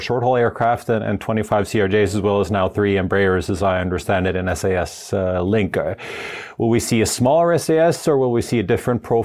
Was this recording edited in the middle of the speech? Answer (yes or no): no